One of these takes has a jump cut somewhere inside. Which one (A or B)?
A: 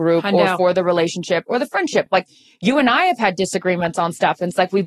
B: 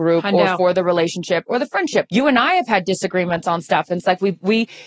B